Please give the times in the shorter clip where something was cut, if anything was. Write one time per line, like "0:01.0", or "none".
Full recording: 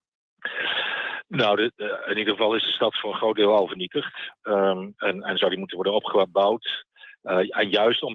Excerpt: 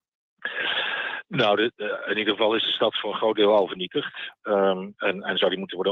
none